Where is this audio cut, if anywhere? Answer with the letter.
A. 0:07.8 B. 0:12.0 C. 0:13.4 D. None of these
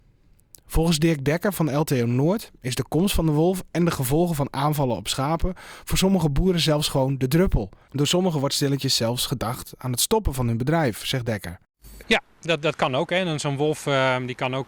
B